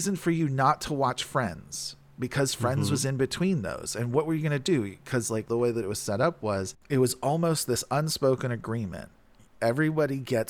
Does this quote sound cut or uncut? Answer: cut